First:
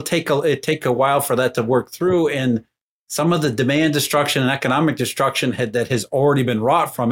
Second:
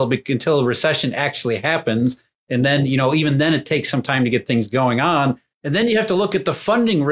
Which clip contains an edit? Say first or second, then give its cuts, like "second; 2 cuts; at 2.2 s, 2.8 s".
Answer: second; 1 cut; at 5.6 s